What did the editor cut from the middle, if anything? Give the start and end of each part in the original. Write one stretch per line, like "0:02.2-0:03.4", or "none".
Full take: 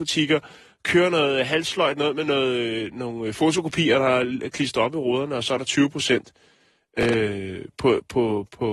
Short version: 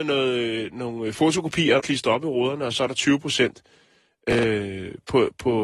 0:04.0-0:04.5